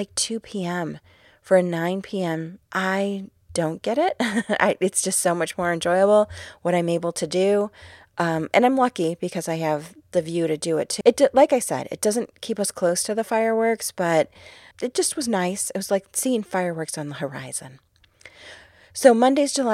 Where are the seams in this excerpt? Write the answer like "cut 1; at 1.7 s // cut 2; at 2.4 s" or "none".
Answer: cut 1; at 2.6 s // cut 2; at 11.0 s // cut 3; at 14.7 s